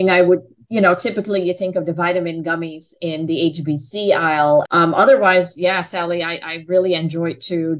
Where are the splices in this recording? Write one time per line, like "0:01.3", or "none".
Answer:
0:04.6